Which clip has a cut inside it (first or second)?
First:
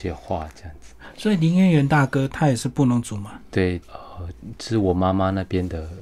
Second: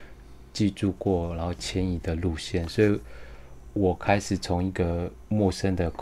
first